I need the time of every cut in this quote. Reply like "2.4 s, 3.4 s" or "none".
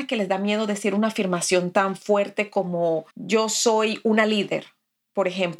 3.1 s